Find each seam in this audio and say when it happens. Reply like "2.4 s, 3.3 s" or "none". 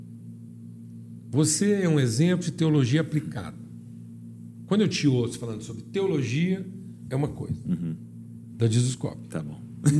8.5 s